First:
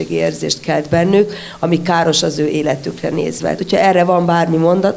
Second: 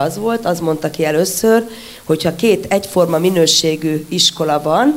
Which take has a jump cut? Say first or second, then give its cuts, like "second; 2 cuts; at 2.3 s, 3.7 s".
first; 1 cut; at 3.6 s